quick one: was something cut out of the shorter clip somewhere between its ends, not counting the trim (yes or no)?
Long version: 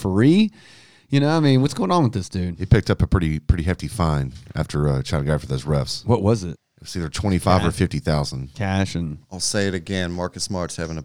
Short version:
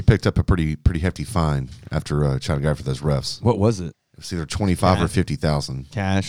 no